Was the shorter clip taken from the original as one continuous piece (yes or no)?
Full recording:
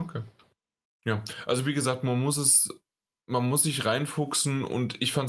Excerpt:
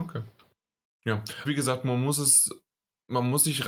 no